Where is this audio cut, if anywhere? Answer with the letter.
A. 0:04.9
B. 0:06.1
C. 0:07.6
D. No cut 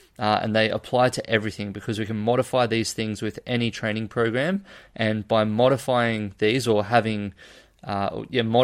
D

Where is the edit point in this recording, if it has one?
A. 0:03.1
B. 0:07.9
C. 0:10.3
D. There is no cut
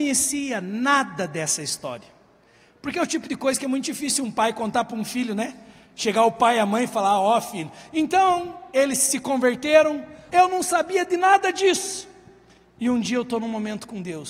C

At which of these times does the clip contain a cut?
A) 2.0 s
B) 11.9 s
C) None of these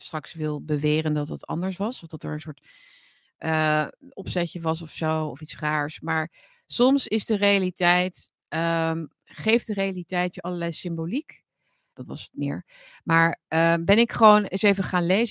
B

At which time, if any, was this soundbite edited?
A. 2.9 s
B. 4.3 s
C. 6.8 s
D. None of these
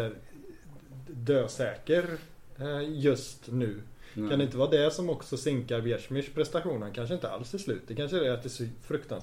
D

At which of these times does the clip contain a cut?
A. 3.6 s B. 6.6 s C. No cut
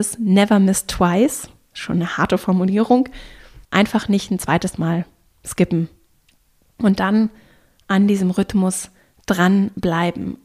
A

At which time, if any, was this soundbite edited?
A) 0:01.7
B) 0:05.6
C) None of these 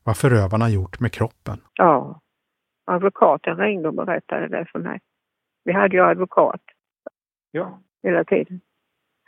A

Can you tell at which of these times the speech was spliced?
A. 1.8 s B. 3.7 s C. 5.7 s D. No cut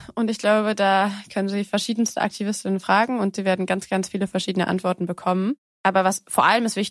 C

